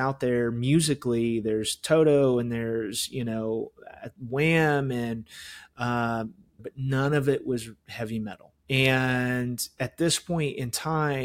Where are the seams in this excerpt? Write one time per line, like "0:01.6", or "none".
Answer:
0:06.6
0:08.6